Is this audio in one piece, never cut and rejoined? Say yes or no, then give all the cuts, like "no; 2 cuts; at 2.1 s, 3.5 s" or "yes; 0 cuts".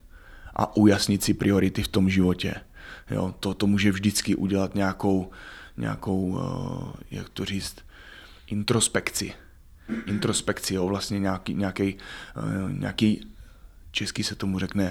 yes; 0 cuts